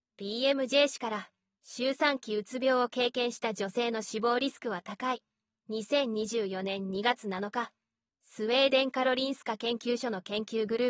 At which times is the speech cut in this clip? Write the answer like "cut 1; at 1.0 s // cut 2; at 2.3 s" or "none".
none